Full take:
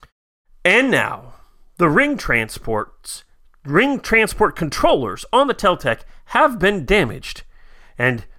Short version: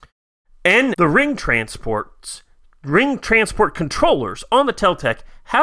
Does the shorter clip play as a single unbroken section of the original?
no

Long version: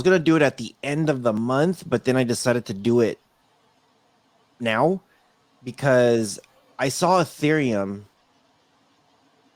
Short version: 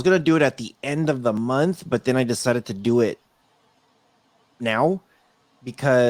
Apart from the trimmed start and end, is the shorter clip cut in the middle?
no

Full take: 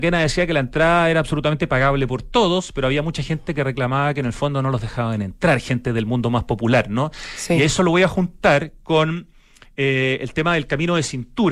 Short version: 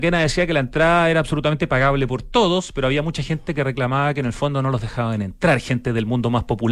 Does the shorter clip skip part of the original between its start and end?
no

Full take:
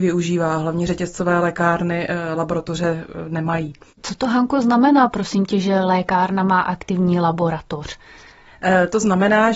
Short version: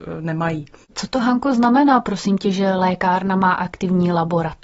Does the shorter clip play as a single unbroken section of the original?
yes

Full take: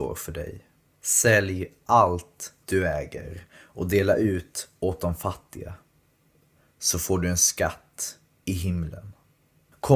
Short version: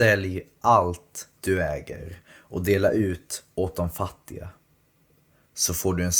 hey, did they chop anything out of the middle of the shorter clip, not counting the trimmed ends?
no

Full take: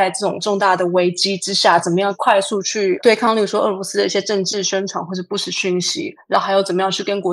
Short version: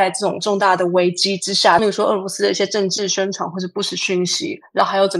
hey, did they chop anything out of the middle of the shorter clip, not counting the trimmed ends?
yes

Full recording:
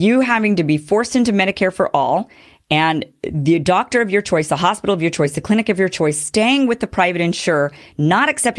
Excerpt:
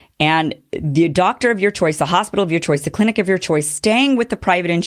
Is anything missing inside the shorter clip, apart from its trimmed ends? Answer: no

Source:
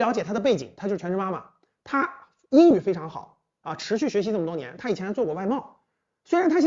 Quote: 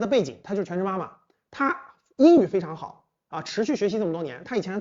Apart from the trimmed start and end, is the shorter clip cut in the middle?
no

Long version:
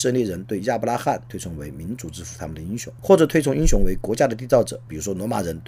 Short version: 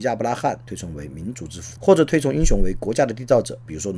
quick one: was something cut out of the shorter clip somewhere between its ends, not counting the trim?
yes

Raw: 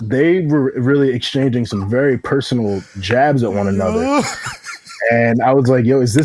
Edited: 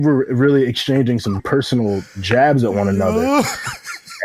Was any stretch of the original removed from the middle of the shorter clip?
yes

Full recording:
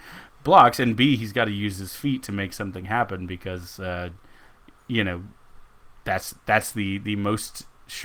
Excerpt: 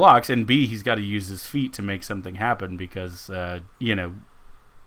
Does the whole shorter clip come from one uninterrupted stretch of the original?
no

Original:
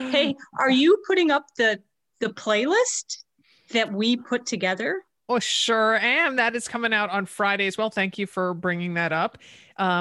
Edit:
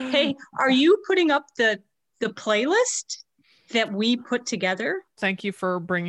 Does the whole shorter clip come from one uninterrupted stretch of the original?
no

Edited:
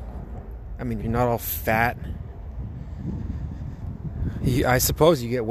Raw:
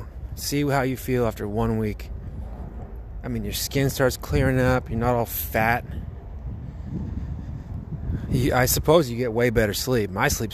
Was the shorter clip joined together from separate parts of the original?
yes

